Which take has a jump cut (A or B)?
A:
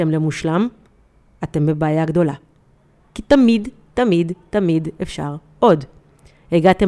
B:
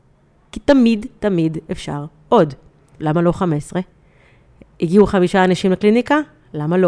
B